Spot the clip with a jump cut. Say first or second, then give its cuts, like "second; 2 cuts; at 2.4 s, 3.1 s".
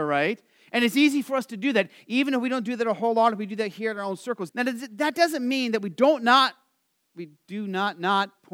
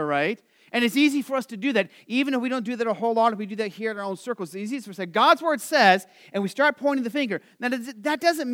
first; 1 cut; at 4.5 s